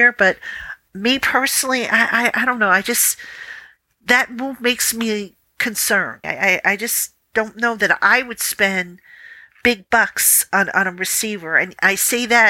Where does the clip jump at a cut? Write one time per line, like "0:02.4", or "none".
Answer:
0:06.2